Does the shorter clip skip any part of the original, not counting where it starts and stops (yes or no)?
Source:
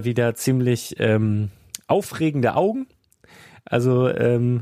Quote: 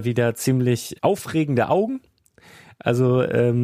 yes